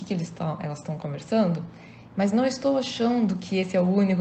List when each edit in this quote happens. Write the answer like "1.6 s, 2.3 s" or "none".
2.1 s